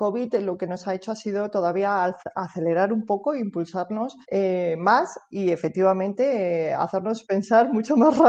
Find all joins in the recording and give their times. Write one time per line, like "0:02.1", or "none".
0:04.2